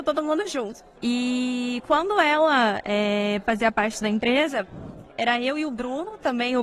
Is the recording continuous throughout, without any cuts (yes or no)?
no